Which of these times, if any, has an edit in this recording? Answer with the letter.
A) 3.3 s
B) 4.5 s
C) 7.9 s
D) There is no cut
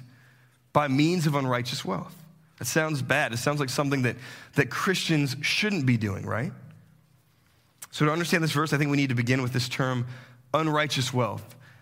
D